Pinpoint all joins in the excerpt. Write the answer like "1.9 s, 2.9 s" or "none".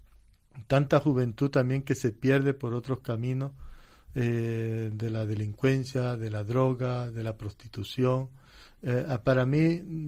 none